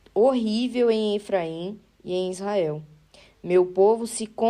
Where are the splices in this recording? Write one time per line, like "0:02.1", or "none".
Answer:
none